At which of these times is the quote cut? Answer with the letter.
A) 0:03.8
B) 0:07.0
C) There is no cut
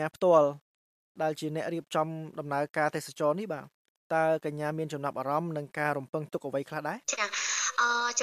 B